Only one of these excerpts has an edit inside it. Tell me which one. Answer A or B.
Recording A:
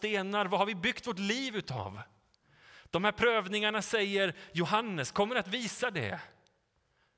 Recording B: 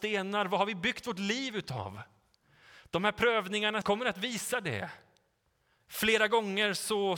B